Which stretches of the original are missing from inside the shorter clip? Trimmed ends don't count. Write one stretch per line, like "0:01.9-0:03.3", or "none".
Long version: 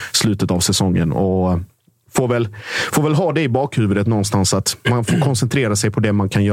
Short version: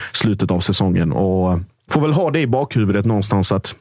0:01.9-0:02.9